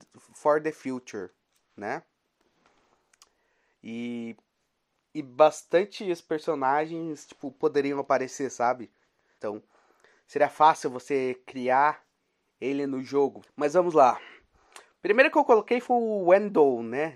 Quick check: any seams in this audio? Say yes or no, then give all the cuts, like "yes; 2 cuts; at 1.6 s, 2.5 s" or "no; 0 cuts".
yes; 2 cuts; at 9.4 s, 13.4 s